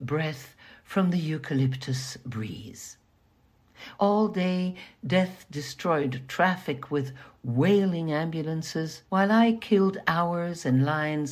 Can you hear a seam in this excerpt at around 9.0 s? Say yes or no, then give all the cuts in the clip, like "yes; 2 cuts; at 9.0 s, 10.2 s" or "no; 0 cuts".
yes; 2 cuts; at 4.0 s, 9.0 s